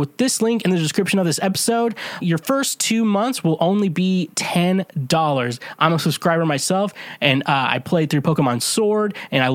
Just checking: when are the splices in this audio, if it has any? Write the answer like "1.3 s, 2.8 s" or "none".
2.2 s